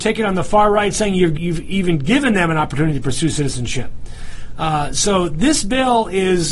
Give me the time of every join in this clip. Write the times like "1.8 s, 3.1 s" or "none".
1.4 s